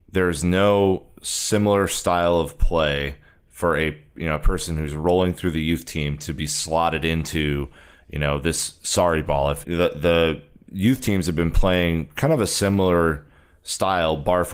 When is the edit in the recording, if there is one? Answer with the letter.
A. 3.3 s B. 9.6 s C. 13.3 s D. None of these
B